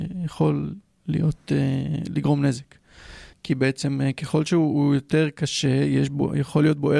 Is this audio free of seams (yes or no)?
no